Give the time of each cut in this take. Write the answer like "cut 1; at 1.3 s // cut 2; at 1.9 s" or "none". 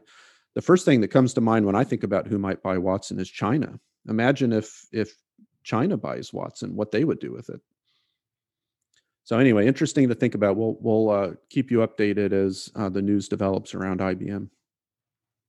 none